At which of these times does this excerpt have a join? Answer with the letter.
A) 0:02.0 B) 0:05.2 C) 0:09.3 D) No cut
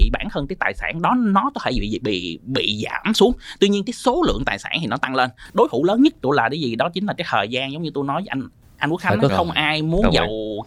C